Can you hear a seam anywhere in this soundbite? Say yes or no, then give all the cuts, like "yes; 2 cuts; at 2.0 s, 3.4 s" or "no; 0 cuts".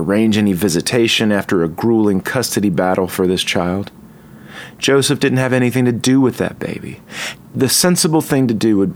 yes; 1 cut; at 7.4 s